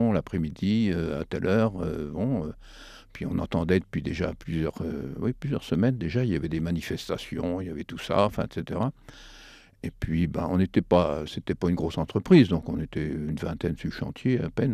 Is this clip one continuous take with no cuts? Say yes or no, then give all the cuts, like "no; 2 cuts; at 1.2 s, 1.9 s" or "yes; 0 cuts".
yes; 0 cuts